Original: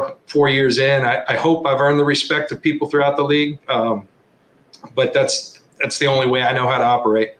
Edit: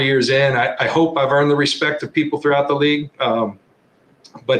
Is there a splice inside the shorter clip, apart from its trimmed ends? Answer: no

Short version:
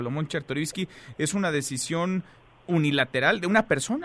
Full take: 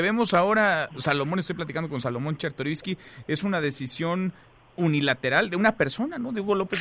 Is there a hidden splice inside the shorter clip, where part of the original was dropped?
no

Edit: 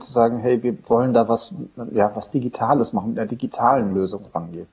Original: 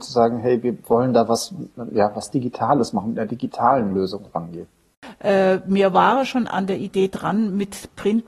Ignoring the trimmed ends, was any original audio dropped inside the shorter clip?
no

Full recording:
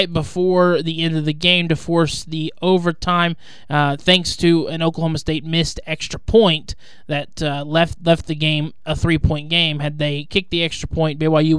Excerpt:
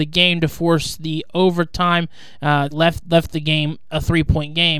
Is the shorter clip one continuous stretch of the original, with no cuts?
no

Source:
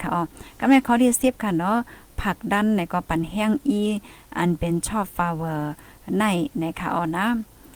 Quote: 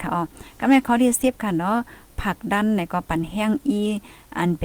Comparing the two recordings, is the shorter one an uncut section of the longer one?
yes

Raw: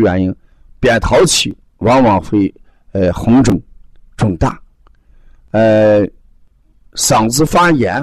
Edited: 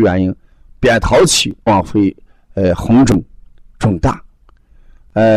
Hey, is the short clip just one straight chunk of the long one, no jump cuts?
no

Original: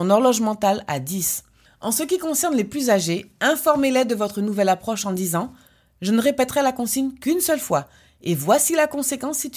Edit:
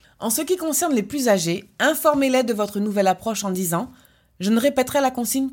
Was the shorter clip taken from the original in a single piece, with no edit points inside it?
yes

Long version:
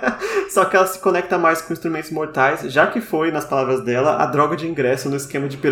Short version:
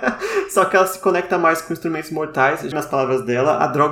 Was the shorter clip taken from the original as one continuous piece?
no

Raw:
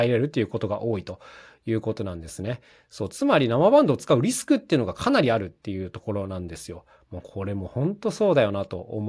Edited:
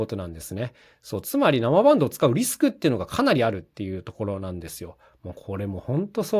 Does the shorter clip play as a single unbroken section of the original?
yes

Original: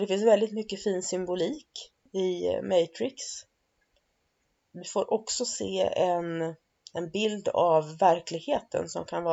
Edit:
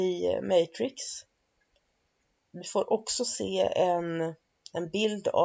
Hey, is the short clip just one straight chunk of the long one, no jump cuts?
yes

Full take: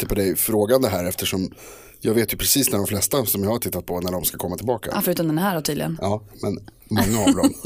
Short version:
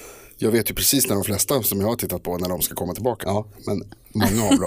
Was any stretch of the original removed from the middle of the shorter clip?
yes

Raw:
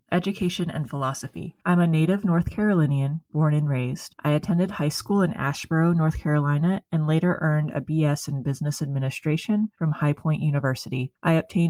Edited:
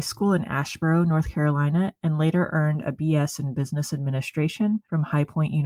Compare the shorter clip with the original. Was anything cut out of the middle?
no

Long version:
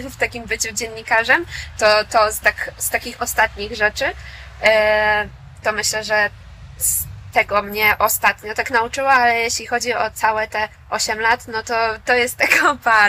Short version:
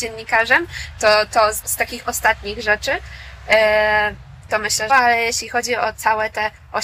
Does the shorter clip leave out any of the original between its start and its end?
yes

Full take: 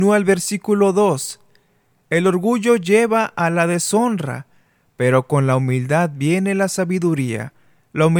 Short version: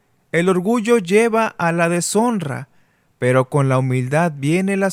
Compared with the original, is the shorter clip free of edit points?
yes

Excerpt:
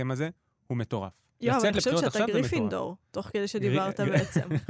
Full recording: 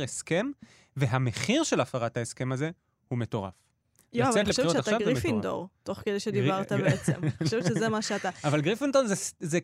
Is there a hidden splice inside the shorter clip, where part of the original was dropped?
yes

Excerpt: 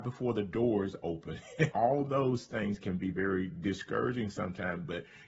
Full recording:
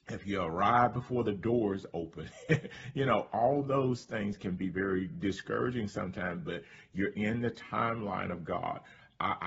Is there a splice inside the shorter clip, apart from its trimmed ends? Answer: yes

